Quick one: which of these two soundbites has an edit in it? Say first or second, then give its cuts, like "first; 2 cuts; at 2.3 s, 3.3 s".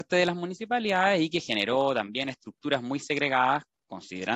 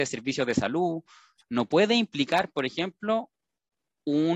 second; 1 cut; at 1.4 s